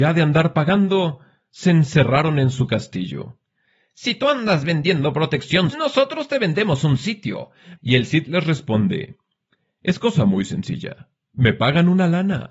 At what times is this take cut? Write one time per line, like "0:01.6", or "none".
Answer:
0:05.7
0:07.7